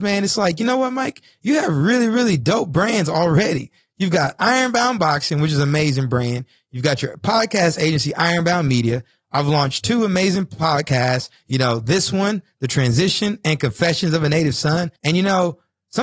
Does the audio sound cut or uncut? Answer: cut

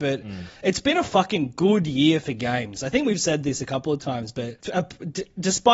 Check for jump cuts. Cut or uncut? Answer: cut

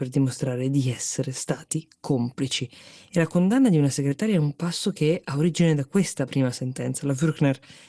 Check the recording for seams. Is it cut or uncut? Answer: uncut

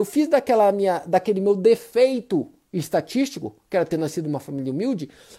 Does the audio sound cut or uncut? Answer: uncut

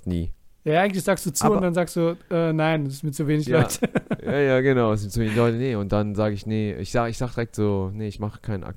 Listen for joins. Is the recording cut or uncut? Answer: uncut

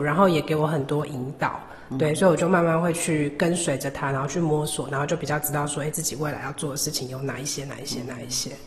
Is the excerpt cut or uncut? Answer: uncut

